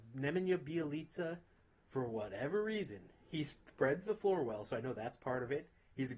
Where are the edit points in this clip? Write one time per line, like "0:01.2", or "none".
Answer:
none